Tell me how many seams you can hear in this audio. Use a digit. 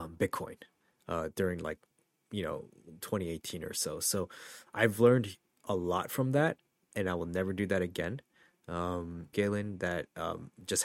1